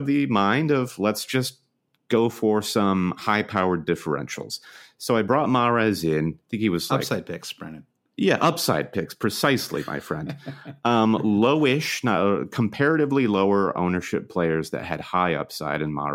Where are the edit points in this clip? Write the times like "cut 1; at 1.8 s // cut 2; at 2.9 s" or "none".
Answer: none